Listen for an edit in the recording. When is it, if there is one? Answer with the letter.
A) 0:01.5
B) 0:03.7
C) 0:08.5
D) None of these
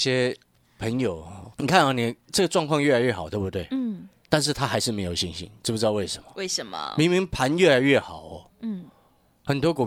A